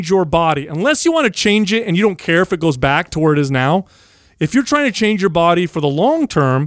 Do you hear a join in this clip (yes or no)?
no